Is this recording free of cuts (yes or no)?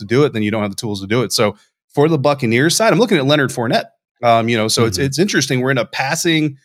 yes